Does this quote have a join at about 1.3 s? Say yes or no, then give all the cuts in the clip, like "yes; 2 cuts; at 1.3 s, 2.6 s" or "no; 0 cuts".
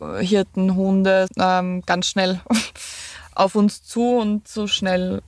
yes; 1 cut; at 1.3 s